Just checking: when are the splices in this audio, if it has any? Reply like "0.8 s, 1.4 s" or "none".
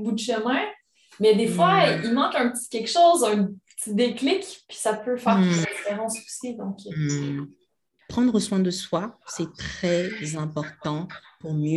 8.0 s